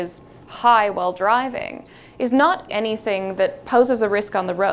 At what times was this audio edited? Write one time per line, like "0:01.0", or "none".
0:02.7